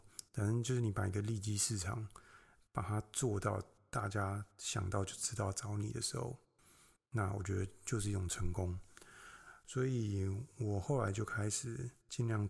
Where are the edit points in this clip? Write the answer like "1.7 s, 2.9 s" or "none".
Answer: none